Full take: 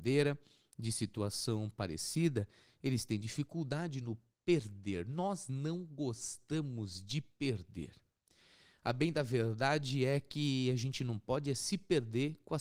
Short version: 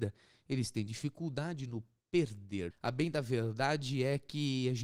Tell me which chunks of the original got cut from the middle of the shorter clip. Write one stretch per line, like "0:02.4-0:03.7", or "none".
0:05.0-0:08.7